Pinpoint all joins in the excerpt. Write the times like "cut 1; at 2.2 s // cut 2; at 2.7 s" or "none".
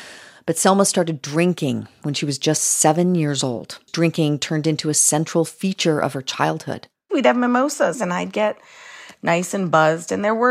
cut 1; at 3.9 s